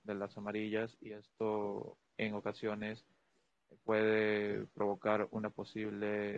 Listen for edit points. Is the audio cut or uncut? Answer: uncut